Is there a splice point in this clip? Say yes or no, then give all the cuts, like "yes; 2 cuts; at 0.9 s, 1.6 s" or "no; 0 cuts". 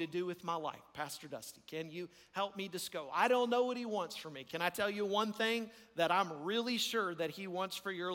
no; 0 cuts